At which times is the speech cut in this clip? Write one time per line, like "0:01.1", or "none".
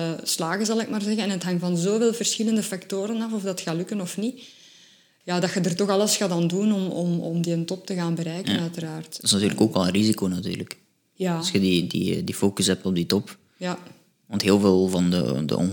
none